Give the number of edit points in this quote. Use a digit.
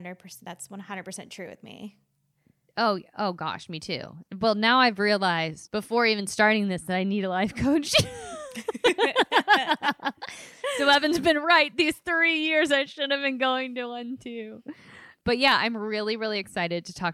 0